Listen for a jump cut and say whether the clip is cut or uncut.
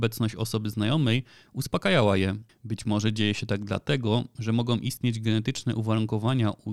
cut